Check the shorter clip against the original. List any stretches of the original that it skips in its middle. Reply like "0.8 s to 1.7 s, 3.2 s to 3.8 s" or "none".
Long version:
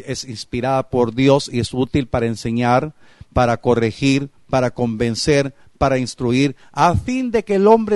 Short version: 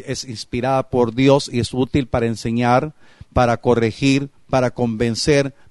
none